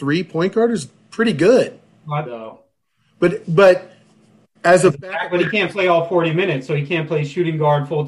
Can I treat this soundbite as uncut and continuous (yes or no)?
no